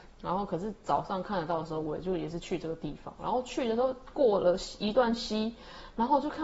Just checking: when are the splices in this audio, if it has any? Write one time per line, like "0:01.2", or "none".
none